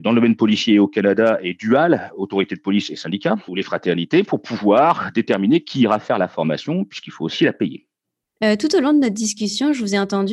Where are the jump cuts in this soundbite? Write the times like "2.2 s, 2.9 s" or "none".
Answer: 3.5 s, 8.4 s

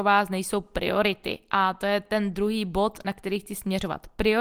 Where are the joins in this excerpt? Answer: none

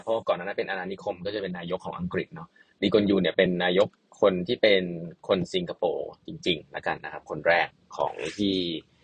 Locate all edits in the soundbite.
none

